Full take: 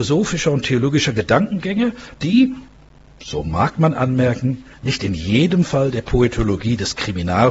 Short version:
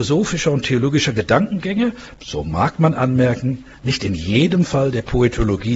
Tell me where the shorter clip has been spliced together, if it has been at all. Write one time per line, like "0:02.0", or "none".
0:02.2

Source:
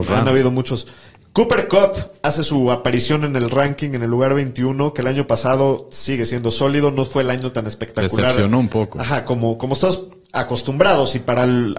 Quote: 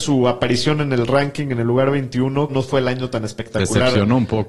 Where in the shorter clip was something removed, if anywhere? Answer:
0:02.5

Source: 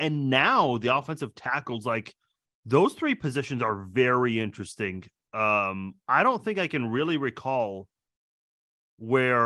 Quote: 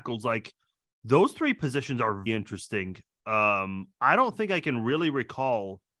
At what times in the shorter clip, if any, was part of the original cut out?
0:02.3

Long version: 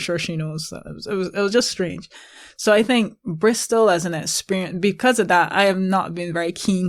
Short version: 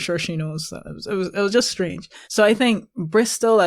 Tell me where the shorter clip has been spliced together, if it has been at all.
0:02.2

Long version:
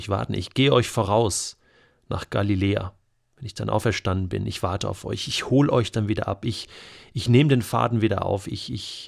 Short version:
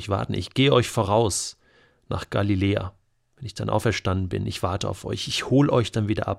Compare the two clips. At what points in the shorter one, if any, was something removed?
none

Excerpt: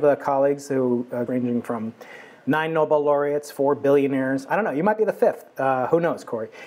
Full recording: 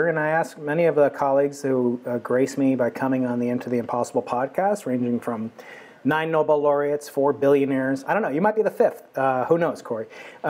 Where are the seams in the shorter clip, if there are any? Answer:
0:01.3

